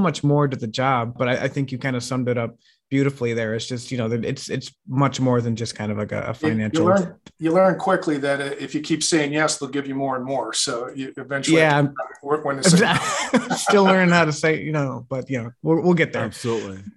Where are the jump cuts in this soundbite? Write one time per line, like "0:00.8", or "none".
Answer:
none